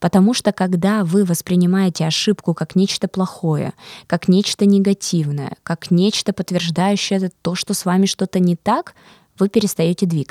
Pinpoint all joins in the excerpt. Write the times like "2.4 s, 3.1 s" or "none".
none